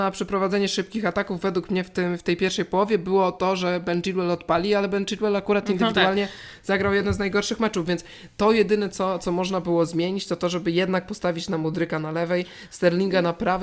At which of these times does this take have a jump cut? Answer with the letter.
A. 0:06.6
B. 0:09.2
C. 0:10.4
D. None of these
B